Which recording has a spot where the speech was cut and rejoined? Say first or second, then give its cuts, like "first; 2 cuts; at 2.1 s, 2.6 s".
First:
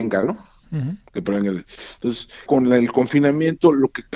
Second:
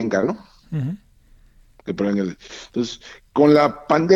first; 2 cuts; at 1.1 s, 2.5 s